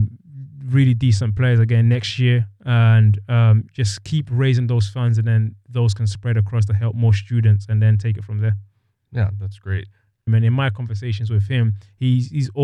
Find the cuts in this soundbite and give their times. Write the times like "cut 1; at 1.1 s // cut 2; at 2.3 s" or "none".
cut 1; at 10.3 s